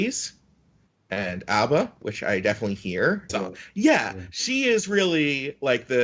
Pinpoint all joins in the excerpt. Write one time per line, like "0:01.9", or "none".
0:03.3

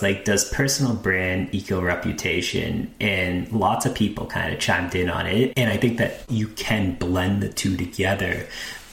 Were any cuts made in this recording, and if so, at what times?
0:05.5

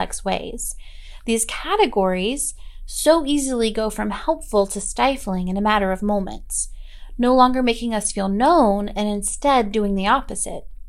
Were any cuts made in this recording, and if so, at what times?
none

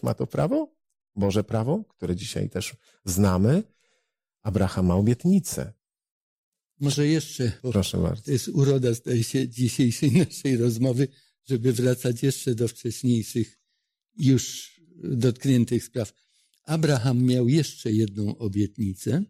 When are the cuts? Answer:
0:07.6

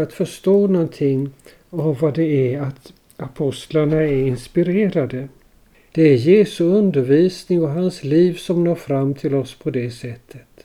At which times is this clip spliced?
0:05.9

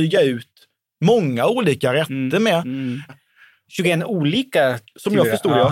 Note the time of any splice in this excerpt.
0:03.1

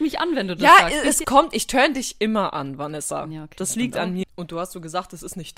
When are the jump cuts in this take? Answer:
0:01.2
0:04.2

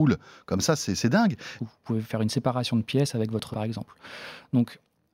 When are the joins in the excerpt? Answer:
0:01.6
0:03.5

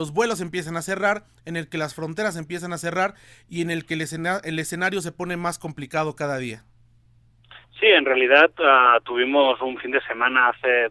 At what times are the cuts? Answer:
none

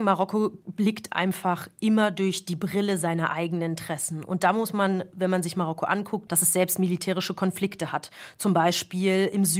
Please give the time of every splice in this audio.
0:06.3

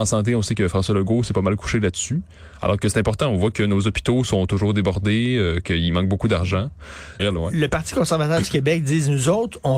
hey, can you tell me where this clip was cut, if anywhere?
0:07.2

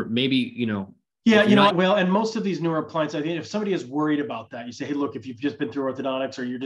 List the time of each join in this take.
0:01.7

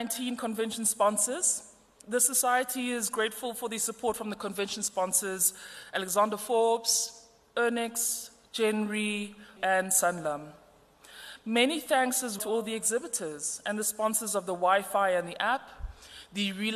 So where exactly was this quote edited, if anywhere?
0:09.6
0:12.4

